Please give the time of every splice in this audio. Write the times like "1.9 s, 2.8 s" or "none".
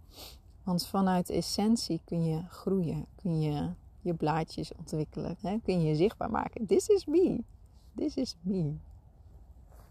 5.4 s